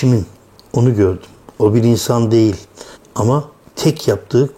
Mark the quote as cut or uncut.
cut